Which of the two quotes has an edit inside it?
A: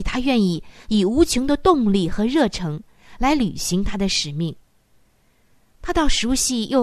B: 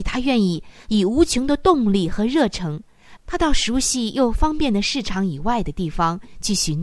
B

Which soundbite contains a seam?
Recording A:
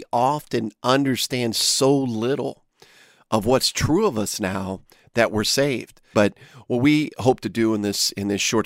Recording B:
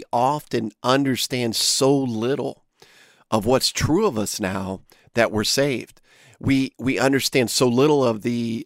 A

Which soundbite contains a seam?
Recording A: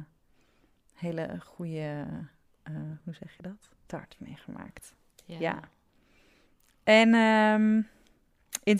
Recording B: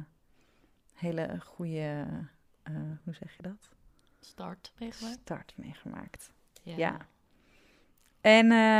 A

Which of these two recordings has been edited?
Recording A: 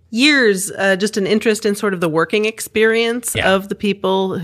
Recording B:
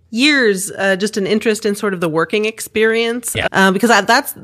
B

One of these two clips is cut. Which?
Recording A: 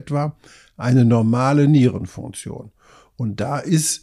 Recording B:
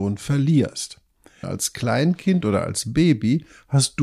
B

